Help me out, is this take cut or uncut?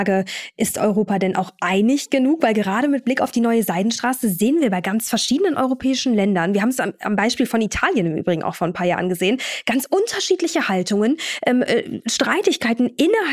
uncut